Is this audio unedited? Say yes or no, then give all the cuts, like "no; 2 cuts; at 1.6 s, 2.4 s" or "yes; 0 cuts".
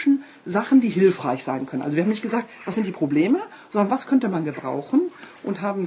yes; 0 cuts